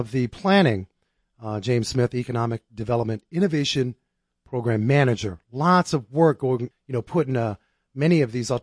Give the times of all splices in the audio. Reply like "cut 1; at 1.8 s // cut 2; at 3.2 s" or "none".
cut 1; at 6.7 s